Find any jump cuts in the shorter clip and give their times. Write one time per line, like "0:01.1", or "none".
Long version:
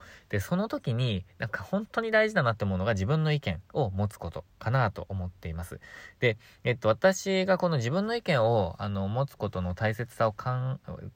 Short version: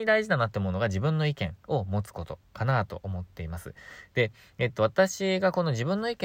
none